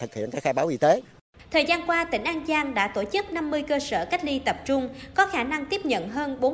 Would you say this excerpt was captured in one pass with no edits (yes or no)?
yes